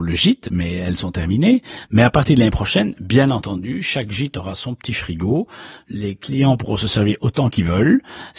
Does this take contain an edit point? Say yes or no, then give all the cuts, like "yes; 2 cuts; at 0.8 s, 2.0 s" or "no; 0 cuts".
no; 0 cuts